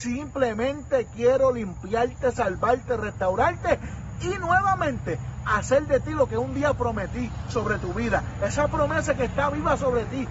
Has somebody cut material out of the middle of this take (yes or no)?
no